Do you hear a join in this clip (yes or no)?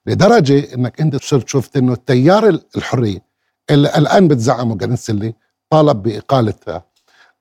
yes